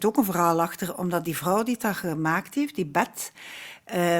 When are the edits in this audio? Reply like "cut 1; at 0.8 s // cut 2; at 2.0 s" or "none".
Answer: none

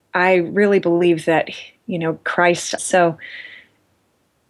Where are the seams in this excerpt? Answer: cut 1; at 2.8 s

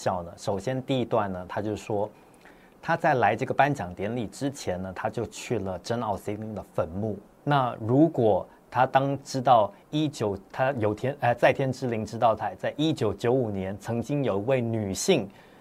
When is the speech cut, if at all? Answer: cut 1; at 7.3 s

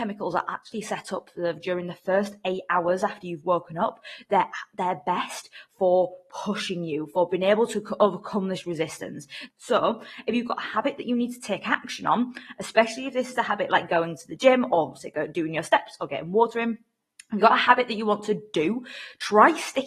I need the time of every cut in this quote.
cut 1; at 9.5 s

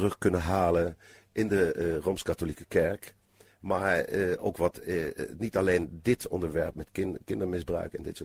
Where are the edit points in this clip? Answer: cut 1; at 6.7 s

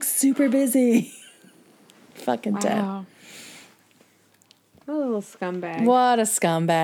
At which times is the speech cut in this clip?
none

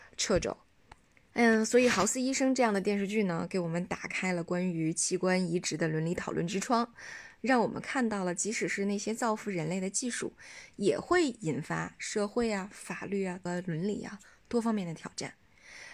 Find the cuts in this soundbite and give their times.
cut 1; at 1.3 s // cut 2; at 13.5 s

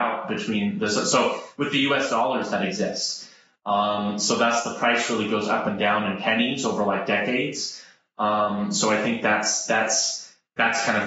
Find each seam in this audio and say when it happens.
cut 1; at 2.1 s

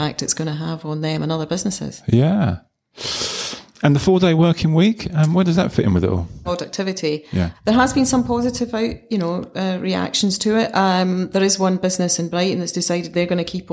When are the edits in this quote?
cut 1; at 6.5 s // cut 2; at 7.5 s

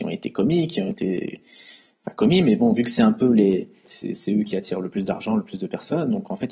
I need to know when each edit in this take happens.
cut 1; at 3.8 s

